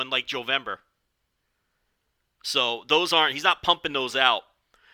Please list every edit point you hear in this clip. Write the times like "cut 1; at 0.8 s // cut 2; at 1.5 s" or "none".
none